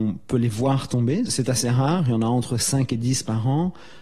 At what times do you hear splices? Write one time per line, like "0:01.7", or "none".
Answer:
0:01.3